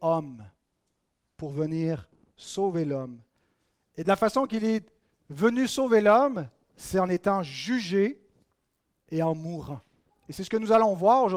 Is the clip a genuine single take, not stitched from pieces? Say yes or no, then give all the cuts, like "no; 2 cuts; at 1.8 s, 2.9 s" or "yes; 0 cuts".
no; 1 cut; at 10.1 s